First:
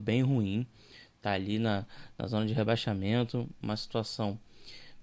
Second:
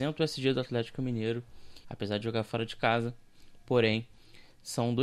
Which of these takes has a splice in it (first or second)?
second